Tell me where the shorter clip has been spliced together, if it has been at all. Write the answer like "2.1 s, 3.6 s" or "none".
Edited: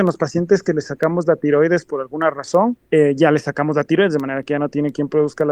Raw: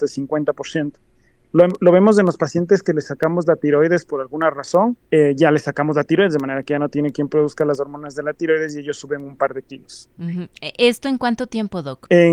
none